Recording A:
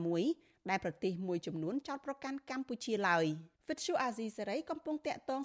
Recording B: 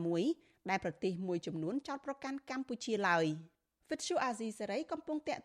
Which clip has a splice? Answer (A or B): A